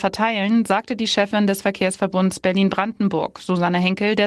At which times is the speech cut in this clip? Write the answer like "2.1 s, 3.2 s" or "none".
none